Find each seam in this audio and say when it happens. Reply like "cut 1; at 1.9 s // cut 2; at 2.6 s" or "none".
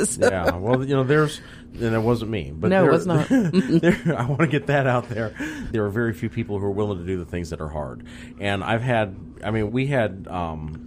cut 1; at 5.7 s // cut 2; at 9.7 s